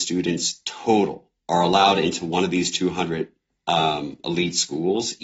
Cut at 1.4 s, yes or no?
yes